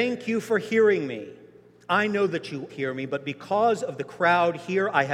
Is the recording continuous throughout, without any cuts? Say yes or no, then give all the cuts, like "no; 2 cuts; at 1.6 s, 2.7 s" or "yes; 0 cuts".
no; 1 cut; at 2.7 s